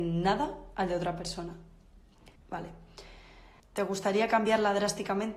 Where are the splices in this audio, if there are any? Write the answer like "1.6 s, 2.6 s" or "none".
2.4 s, 3.6 s